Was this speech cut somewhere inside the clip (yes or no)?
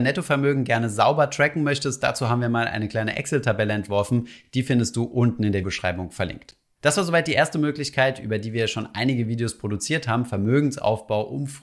no